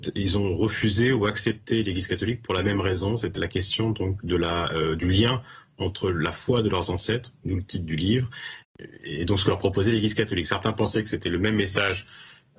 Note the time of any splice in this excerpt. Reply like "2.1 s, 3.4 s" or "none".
3.4 s